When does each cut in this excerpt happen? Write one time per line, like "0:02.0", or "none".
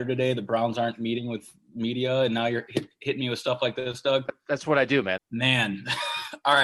0:05.2